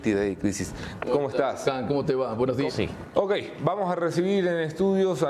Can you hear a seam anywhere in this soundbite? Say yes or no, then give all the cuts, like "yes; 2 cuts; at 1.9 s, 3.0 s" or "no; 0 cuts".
yes; 2 cuts; at 1.0 s, 2.7 s